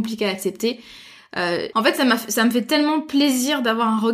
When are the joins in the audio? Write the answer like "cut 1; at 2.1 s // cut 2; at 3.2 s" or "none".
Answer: cut 1; at 1.7 s